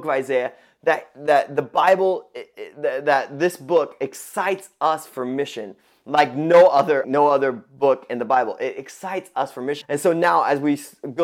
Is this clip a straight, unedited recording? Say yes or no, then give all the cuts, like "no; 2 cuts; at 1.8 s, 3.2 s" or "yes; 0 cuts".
no; 2 cuts; at 7.0 s, 9.8 s